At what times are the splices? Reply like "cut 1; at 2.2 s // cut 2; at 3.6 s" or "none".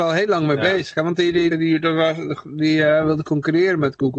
cut 1; at 1.5 s